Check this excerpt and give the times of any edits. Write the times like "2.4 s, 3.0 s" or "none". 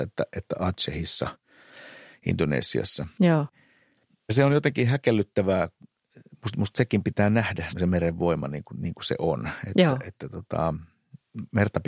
7.7 s